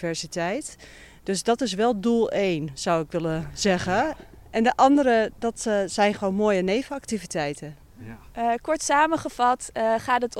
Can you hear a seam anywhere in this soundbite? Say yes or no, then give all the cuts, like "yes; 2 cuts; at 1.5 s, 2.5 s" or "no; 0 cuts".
no; 0 cuts